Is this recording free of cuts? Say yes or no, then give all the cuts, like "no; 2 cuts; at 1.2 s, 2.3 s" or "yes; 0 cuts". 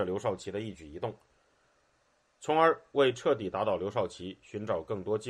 yes; 0 cuts